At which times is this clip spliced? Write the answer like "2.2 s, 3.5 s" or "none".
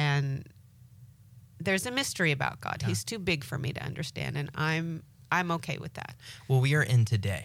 none